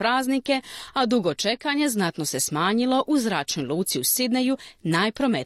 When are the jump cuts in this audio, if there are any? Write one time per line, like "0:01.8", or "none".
none